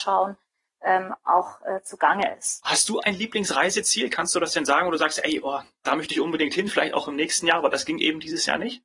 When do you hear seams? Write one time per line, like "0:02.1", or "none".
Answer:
0:02.6